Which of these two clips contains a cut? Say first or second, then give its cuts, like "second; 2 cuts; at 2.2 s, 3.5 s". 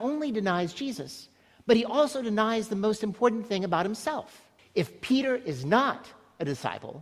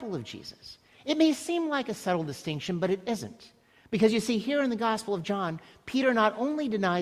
first; 1 cut; at 4.6 s